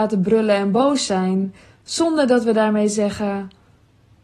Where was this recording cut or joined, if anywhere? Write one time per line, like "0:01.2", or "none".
none